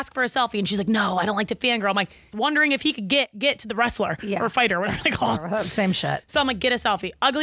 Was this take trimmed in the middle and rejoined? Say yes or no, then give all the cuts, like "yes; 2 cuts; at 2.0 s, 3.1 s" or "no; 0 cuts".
yes; 1 cut; at 2.3 s